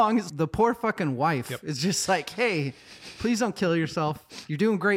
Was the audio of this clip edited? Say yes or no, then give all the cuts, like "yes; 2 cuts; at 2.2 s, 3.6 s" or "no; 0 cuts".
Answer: no; 0 cuts